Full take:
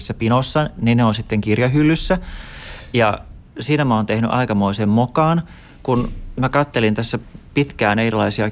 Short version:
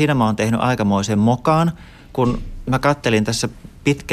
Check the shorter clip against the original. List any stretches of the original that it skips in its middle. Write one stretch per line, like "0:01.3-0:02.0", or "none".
none